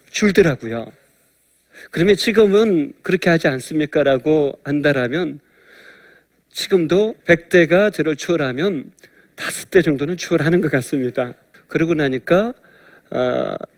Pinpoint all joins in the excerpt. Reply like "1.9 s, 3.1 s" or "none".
7.2 s, 11.5 s